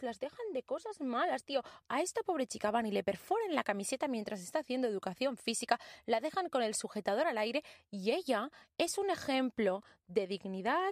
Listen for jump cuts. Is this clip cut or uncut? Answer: uncut